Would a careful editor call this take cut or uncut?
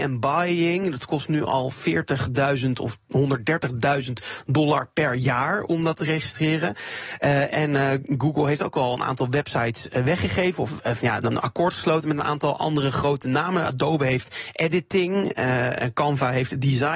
cut